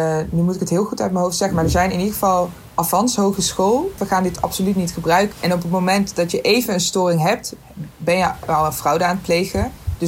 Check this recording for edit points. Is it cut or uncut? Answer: cut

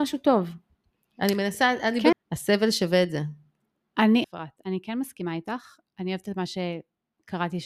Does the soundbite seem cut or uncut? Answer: cut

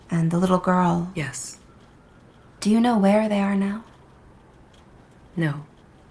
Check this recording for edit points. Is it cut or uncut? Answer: uncut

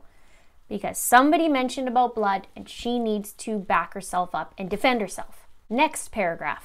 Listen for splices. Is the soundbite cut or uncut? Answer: uncut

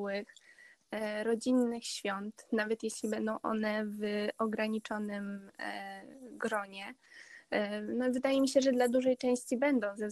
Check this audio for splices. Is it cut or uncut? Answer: uncut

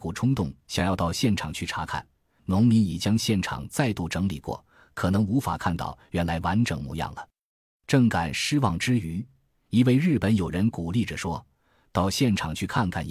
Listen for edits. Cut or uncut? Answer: cut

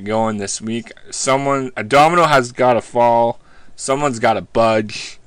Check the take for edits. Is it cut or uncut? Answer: uncut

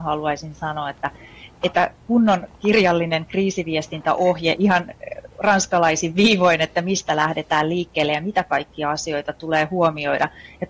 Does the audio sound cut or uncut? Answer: uncut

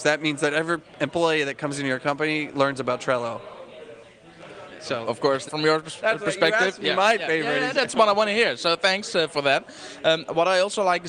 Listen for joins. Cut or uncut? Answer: cut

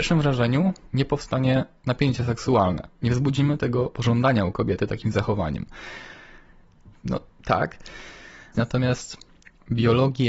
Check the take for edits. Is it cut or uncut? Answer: cut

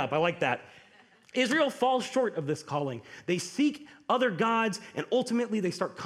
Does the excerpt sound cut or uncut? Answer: uncut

